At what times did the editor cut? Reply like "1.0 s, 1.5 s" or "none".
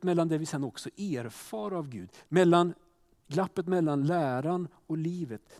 2.2 s